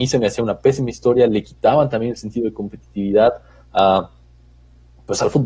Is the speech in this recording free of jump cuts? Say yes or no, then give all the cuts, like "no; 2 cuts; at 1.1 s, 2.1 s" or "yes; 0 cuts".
yes; 0 cuts